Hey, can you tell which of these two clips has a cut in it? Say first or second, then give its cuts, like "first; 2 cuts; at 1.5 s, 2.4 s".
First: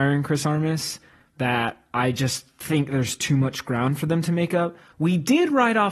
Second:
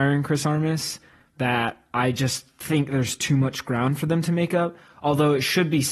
first; 1 cut; at 4.9 s